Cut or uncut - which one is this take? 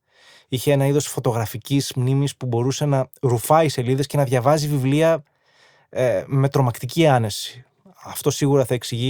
uncut